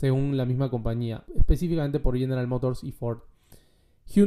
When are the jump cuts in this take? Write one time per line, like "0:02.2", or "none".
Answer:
0:01.2